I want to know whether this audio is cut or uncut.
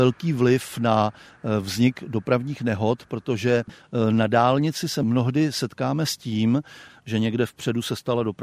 cut